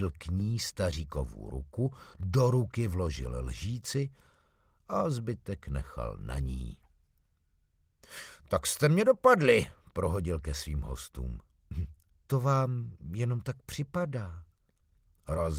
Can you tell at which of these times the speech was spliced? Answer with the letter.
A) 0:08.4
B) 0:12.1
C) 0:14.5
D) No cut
B